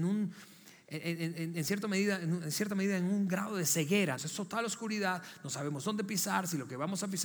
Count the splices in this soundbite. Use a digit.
1